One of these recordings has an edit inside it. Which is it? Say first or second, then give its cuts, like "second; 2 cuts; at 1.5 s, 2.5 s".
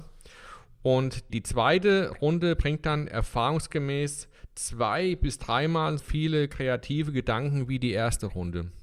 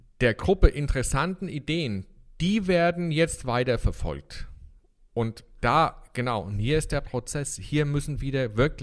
first; 2 cuts; at 1.3 s, 6.0 s